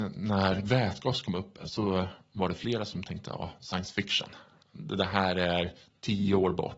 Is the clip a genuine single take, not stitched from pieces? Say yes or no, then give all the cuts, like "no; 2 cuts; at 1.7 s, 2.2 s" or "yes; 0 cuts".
yes; 0 cuts